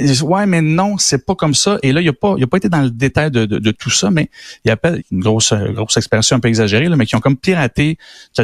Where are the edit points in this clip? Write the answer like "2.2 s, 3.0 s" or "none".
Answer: 5.0 s